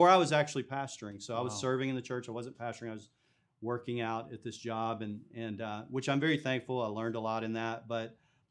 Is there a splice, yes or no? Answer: no